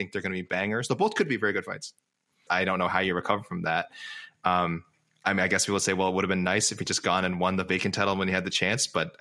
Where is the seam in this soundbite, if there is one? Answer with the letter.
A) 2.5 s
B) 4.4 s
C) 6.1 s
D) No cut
A